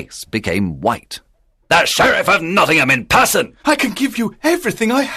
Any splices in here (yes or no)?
yes